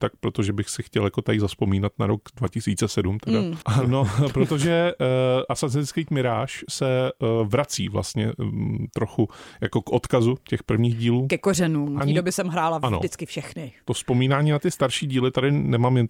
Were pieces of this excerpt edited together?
yes; 2 cuts; at 3.6 s, 12.0 s

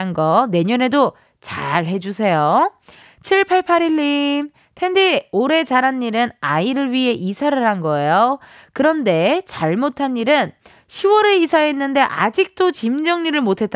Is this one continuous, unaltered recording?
yes; 0 cuts

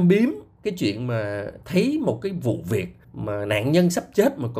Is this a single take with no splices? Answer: no; 1 cut; at 3.0 s

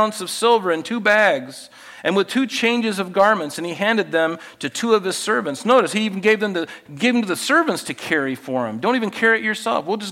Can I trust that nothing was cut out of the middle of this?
yes; 0 cuts

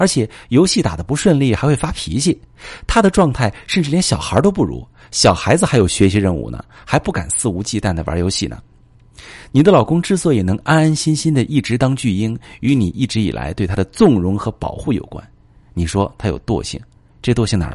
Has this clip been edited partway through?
no; 0 cuts

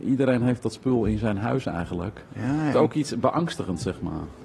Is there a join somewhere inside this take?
yes; 1 cut; at 2.7 s

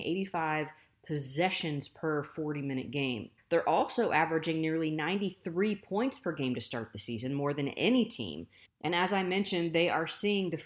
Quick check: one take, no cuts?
no; 2 cuts; at 3.4 s, 8.6 s

